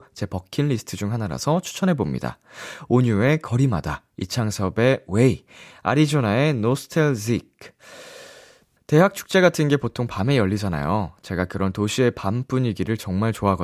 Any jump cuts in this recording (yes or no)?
yes